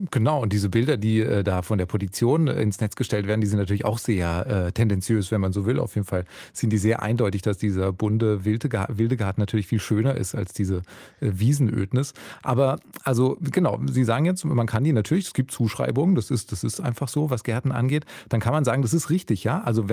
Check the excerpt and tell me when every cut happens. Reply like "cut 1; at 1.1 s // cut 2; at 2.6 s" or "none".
none